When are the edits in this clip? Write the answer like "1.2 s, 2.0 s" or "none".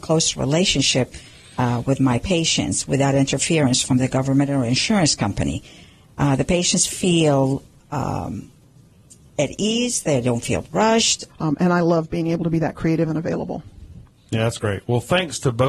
11.3 s